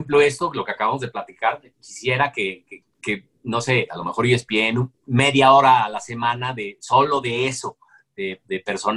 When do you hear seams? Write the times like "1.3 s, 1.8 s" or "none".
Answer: 2.8 s